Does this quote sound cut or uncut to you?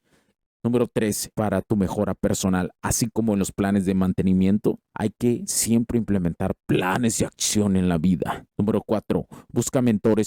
cut